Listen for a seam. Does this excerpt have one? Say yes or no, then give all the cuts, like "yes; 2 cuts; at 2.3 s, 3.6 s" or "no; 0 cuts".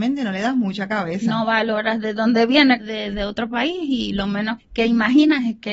yes; 2 cuts; at 2.8 s, 4.6 s